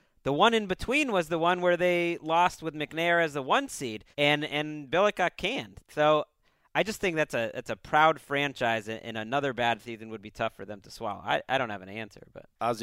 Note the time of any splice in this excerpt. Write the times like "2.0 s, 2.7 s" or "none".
4.1 s